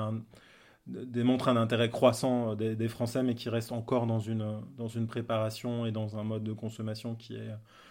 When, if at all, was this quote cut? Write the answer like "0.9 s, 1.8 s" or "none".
none